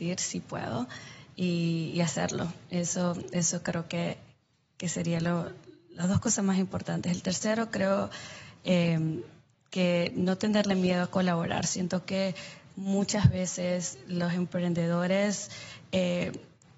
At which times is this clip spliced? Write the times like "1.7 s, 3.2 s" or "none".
none